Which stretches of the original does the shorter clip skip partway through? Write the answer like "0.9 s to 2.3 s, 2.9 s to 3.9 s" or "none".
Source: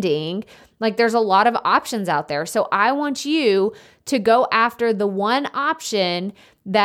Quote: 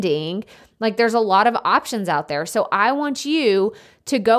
none

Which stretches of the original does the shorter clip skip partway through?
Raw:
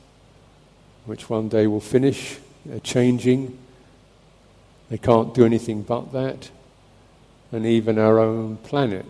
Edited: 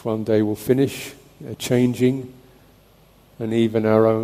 4.4 s to 7.3 s

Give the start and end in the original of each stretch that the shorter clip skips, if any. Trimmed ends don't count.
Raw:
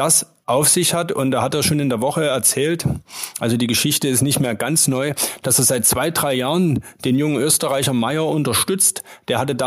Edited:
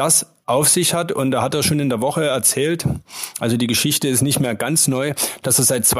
none

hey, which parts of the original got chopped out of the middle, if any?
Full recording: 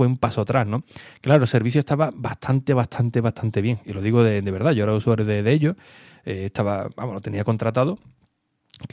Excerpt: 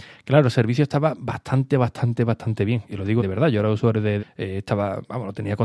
4.2 s to 4.4 s, 5.4 s to 6.1 s

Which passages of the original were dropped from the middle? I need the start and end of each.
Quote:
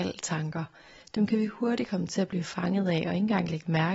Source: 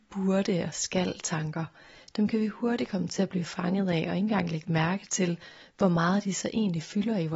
none

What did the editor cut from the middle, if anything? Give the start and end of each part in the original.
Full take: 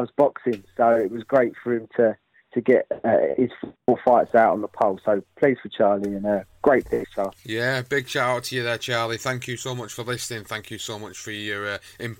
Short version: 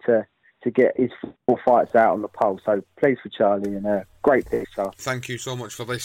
2.9 s to 3.3 s, 7.4 s to 9.2 s

